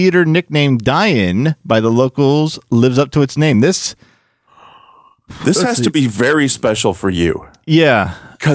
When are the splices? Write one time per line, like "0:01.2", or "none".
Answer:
none

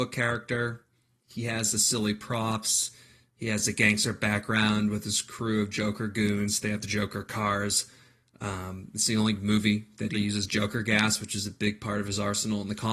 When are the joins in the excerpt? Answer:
0:10.1

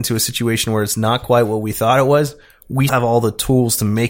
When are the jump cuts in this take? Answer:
0:02.9

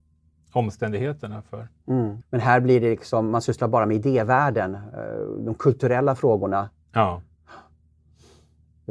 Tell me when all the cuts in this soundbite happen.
0:02.2

